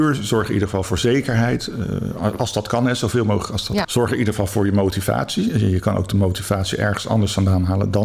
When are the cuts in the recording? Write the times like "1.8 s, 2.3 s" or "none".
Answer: 3.8 s